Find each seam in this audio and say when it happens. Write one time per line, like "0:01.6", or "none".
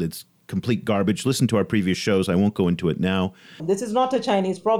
0:03.6